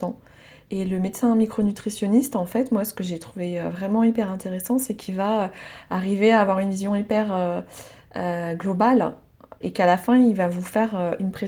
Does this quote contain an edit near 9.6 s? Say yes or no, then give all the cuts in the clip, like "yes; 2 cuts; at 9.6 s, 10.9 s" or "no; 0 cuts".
yes; 1 cut; at 9.6 s